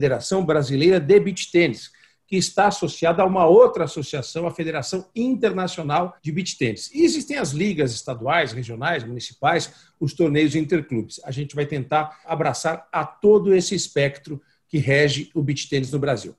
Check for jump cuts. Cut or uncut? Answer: cut